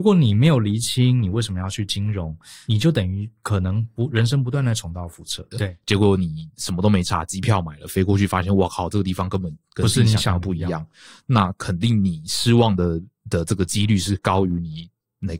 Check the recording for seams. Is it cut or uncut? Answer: cut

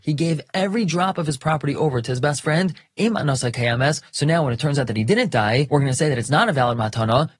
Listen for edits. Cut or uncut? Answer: uncut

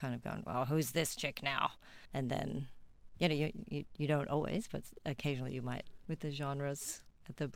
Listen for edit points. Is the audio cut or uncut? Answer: cut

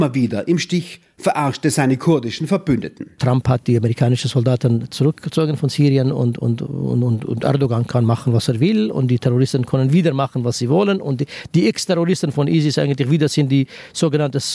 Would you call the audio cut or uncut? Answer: uncut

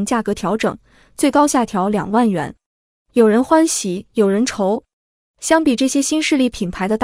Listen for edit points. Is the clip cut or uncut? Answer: uncut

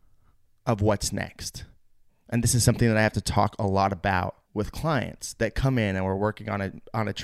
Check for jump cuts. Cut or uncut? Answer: cut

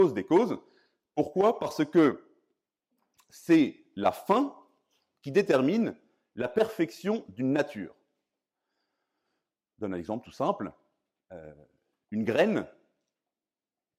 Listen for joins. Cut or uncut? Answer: uncut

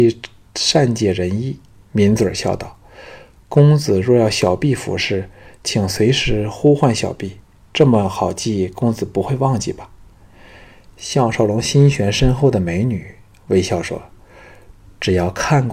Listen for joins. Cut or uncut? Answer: cut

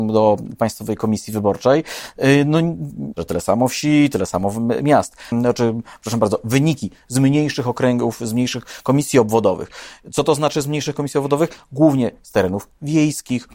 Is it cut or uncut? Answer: cut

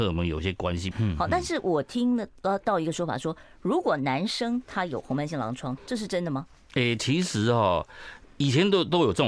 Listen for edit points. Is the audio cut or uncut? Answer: cut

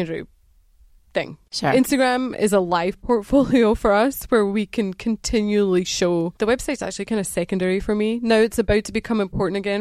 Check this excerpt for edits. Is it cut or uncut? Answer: cut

